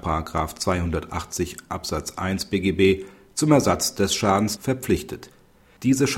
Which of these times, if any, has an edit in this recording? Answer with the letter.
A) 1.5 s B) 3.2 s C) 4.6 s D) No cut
C